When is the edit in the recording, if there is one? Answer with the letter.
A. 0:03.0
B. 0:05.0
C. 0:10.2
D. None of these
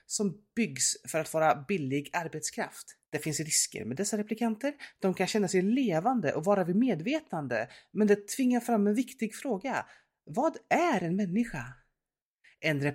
A